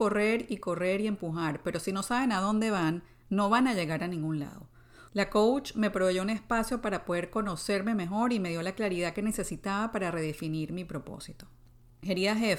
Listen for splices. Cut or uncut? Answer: cut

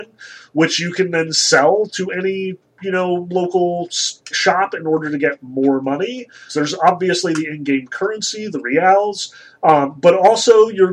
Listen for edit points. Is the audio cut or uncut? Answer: cut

